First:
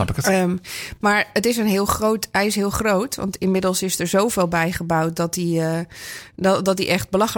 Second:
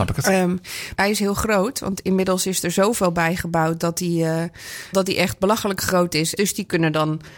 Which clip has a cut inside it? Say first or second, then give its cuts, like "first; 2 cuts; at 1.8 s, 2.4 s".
second; 3 cuts; at 1.0 s, 4.9 s, 6.4 s